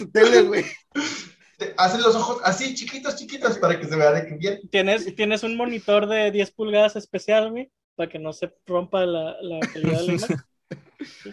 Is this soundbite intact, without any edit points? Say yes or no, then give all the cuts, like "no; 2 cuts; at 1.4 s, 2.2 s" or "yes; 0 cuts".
yes; 0 cuts